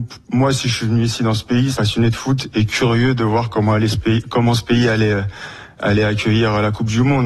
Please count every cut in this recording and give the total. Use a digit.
1